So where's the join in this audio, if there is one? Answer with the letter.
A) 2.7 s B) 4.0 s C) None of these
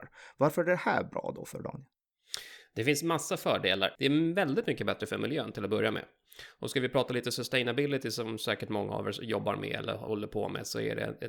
B